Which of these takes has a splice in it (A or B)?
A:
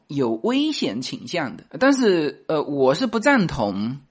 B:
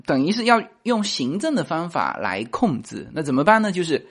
A